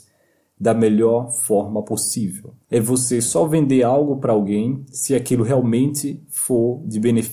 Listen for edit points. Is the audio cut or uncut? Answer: cut